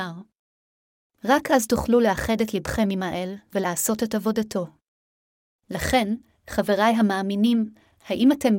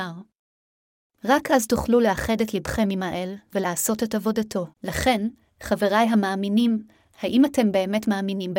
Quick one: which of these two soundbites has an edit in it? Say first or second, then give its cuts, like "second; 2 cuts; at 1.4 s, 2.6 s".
second; 1 cut; at 4.7 s